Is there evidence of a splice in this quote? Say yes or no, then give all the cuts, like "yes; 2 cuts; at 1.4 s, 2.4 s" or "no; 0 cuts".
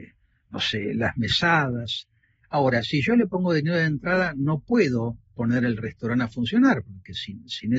yes; 1 cut; at 2.4 s